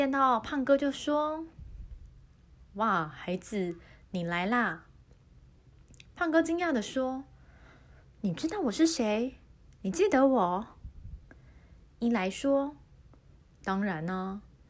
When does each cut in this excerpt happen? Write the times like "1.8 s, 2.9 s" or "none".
none